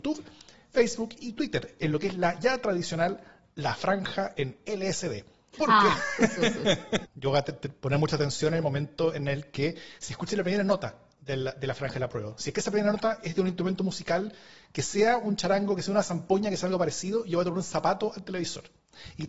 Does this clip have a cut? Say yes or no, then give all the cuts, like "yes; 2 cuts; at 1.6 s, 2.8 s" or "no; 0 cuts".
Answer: yes; 2 cuts; at 5.5 s, 7.1 s